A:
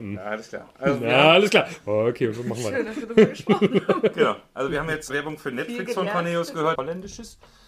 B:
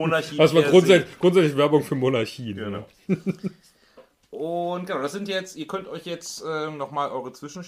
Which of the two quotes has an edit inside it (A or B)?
A